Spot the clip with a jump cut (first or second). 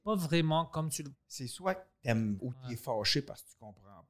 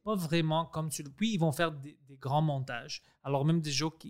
first